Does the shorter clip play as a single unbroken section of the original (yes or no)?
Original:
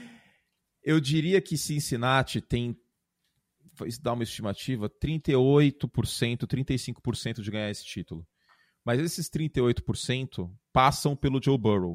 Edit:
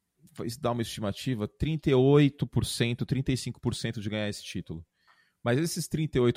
yes